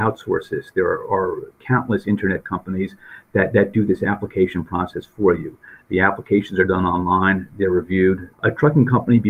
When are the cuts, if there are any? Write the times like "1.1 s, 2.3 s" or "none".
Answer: 8.3 s